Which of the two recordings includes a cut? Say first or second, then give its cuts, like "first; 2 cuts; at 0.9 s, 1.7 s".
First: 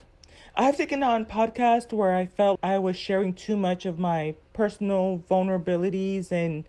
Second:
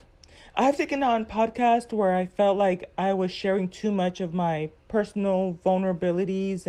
first; 1 cut; at 2.6 s